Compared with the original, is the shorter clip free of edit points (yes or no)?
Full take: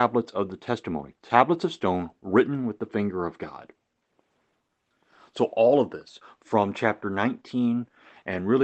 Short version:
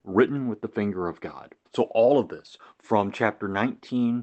no